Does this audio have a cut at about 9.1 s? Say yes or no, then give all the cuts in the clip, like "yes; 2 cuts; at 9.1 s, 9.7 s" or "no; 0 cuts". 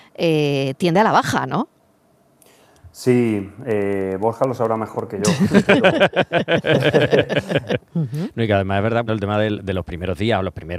yes; 2 cuts; at 7.8 s, 9.1 s